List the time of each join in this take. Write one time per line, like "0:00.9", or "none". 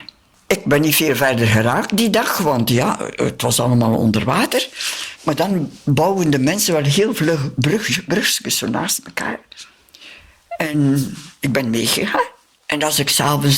none